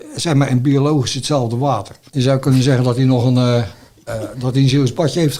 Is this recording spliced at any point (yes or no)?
yes